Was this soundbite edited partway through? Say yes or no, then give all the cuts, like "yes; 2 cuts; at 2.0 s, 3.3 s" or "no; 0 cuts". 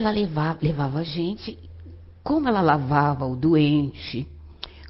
no; 0 cuts